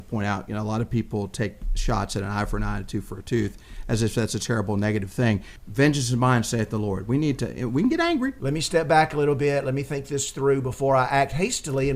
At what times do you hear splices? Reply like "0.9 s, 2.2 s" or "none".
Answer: 5.6 s, 8.4 s

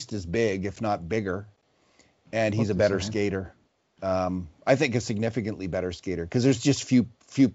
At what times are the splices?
none

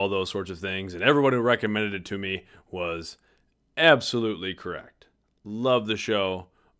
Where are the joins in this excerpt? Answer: none

